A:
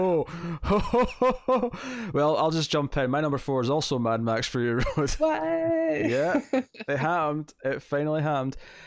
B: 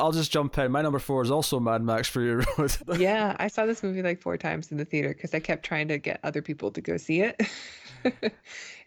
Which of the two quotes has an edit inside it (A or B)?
B